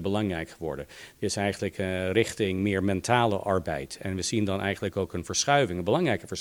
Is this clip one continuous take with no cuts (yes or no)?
yes